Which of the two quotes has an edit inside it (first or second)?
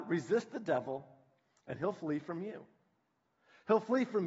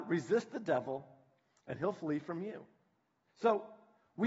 second